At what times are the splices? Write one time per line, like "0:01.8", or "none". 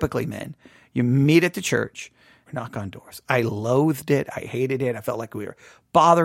0:02.5